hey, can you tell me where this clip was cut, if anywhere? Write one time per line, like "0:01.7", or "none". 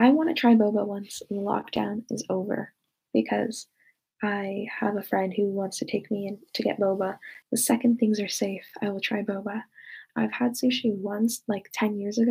0:07.4
0:10.1